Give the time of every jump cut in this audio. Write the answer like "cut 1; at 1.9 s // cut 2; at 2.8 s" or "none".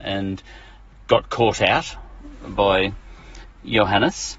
none